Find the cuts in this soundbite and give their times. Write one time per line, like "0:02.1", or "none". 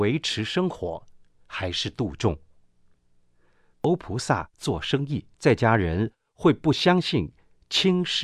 0:03.7
0:05.3